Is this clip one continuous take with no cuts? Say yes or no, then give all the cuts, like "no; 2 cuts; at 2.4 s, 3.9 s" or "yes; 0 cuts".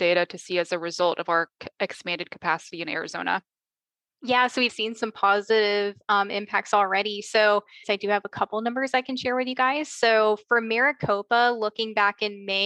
no; 2 cuts; at 4.7 s, 7.8 s